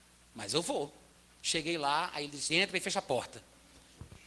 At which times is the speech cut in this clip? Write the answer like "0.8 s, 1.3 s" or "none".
2.5 s